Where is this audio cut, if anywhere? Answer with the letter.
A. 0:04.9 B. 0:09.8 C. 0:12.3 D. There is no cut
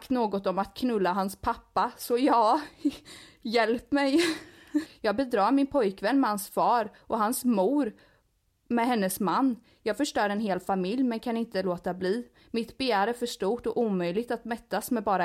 A